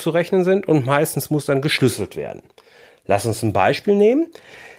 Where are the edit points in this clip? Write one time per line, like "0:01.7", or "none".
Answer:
none